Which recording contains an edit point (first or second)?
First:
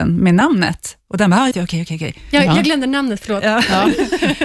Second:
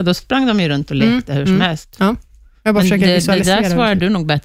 first